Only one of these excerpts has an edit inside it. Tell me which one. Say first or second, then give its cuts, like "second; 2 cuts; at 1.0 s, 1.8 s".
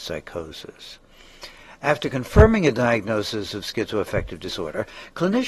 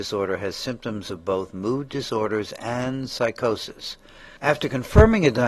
second; 1 cut; at 4.4 s